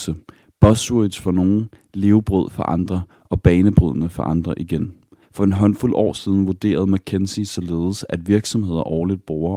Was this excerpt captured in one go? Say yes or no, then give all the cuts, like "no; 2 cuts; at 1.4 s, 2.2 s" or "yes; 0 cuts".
no; 1 cut; at 5.2 s